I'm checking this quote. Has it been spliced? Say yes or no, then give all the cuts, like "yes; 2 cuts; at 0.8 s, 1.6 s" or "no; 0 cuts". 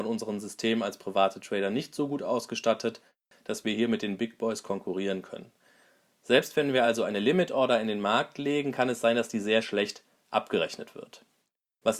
no; 0 cuts